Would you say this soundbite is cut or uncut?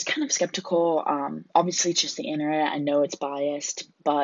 uncut